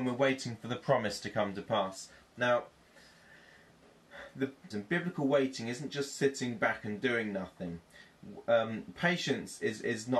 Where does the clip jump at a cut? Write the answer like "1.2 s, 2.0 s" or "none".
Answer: 4.7 s